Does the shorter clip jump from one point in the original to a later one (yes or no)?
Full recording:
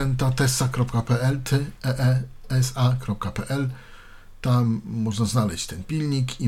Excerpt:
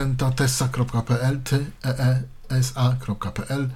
no